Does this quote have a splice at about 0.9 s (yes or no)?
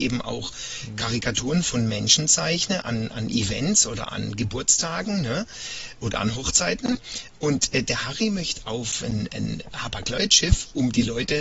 no